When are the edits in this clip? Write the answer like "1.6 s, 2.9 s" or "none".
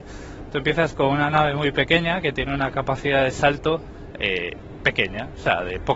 none